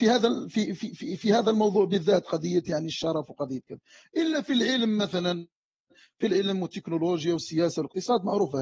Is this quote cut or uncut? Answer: uncut